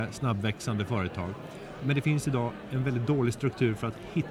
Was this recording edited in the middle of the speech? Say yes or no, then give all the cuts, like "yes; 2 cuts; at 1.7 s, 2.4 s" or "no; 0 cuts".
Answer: no; 0 cuts